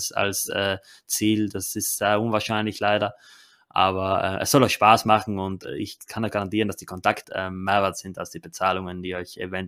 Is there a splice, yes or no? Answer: yes